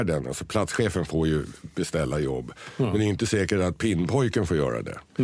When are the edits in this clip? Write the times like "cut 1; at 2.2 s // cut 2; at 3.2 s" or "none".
none